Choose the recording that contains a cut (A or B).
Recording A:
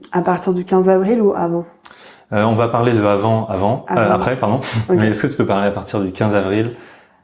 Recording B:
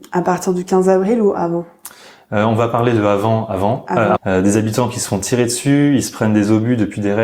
B